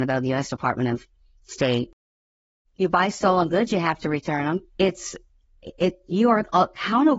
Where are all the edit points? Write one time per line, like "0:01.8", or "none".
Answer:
0:02.6
0:04.7